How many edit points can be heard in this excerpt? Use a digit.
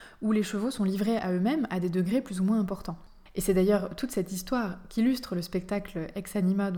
1